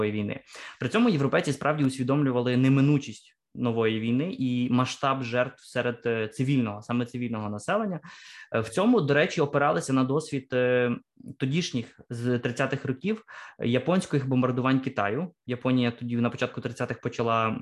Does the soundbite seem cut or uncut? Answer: uncut